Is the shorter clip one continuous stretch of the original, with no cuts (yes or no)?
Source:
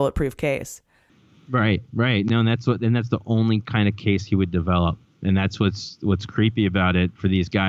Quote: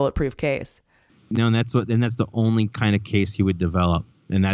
no